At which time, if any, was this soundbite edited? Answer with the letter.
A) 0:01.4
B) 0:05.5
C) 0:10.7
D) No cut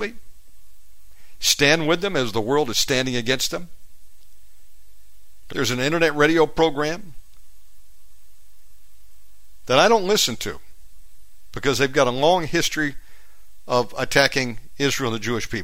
B